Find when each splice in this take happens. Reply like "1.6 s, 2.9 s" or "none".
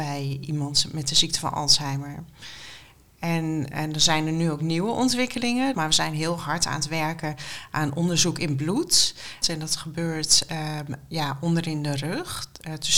5.7 s, 9.4 s